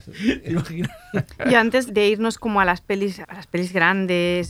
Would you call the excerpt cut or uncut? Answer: cut